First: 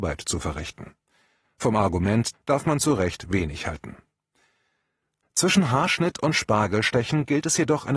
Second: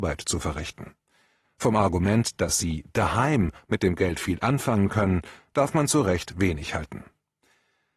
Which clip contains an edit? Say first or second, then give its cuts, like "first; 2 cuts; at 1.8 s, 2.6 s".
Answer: first; 2 cuts; at 2.3 s, 5.2 s